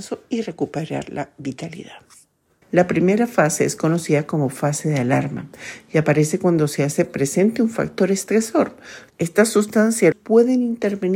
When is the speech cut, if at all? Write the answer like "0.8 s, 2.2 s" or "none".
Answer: 2.6 s, 9.1 s, 10.1 s